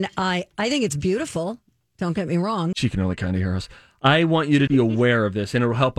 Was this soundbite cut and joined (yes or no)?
yes